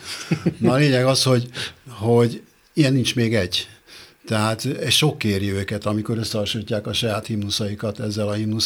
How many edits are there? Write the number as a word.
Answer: zero